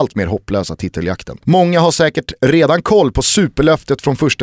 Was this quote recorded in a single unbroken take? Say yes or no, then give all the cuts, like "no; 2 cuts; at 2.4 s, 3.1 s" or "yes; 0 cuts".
no; 1 cut; at 1.4 s